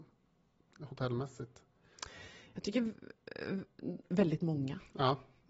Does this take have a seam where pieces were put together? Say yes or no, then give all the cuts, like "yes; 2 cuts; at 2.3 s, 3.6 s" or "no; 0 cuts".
no; 0 cuts